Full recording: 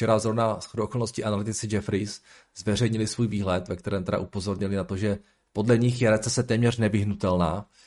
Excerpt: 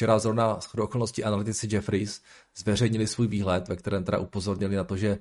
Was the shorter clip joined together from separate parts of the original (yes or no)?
no